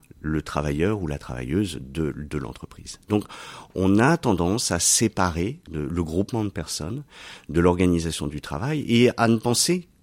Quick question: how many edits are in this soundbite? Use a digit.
0